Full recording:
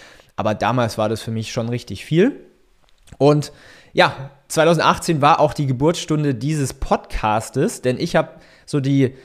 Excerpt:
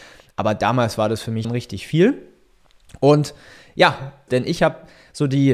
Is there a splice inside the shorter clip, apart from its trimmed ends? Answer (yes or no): yes